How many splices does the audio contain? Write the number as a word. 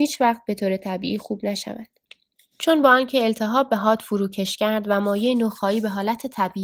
one